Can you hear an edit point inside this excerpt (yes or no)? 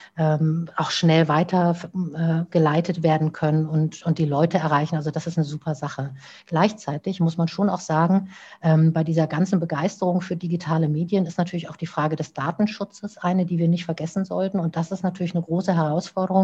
yes